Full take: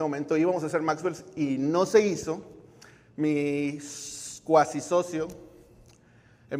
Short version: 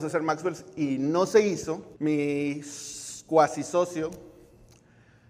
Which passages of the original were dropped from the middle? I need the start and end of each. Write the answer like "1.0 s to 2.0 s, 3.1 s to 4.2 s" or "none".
2.6 s to 3.1 s